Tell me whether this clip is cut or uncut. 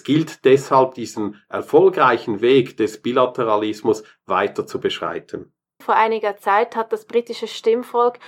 cut